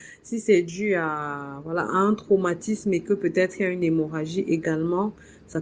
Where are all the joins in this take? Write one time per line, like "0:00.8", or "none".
none